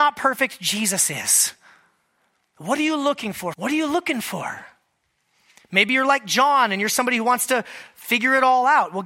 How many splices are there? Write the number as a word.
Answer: one